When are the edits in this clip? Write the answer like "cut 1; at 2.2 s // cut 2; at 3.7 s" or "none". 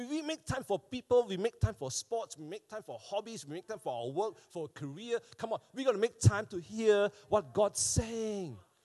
none